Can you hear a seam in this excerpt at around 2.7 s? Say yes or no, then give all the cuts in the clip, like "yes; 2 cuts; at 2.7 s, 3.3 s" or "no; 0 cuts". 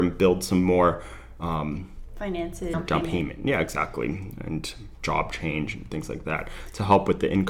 yes; 1 cut; at 2.7 s